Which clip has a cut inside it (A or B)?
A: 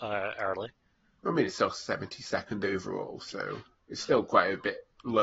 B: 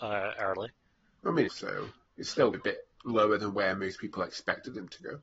B